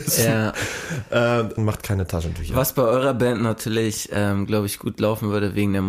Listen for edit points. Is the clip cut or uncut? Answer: cut